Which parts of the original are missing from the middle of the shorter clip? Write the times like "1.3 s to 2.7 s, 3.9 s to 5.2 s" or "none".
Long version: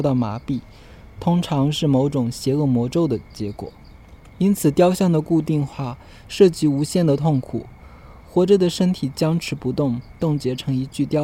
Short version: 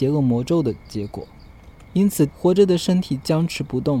4.7 s to 8.2 s

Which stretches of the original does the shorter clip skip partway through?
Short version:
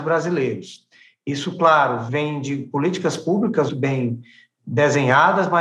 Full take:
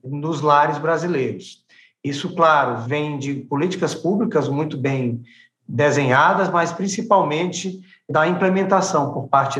4.5 s to 4.7 s

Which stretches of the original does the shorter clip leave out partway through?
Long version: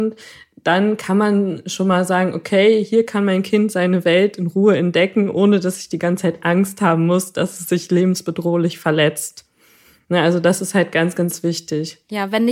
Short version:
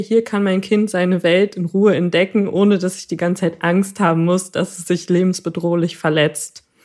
none

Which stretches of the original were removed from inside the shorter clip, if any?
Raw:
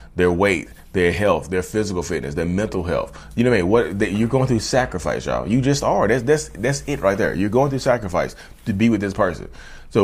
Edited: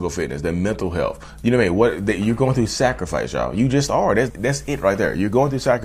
6.2 s to 6.5 s

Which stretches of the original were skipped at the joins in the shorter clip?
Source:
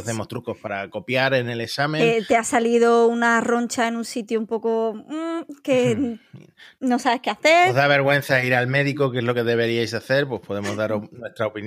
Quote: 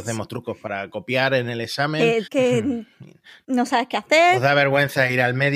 2.3 s to 5.6 s

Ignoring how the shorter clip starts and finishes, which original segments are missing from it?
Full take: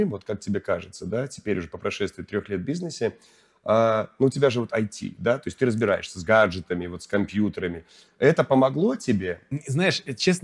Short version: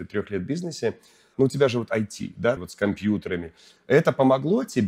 3.5 s to 4.2 s, 5.4 s to 6.9 s

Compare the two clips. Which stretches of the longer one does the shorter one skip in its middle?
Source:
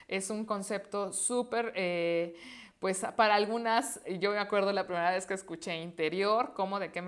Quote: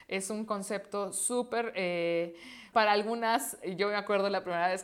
2.7 s to 3.2 s

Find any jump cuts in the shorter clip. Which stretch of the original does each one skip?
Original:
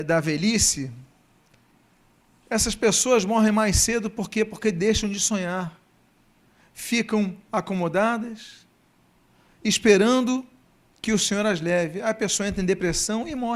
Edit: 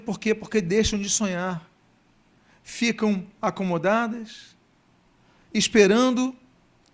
none

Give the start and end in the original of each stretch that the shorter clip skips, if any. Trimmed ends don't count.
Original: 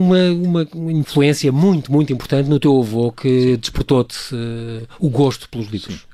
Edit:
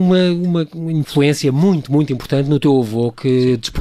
none

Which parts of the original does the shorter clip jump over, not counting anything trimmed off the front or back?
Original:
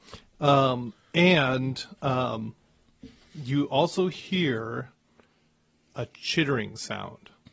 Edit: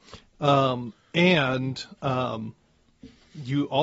none

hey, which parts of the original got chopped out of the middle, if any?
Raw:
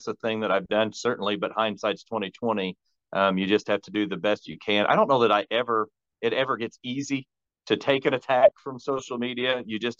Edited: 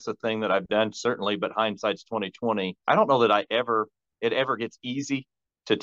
2.9 s to 4.9 s

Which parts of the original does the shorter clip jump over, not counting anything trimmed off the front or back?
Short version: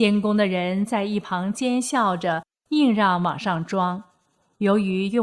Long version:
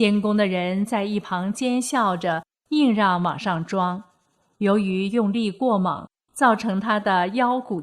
none

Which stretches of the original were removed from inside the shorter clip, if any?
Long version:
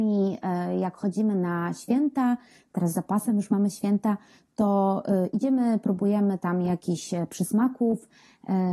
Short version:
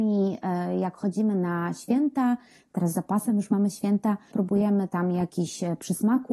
4.3 s to 5.8 s

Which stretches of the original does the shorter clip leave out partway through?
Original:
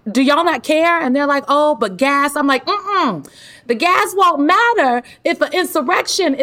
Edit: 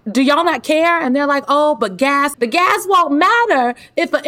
2.3 s to 3.6 s

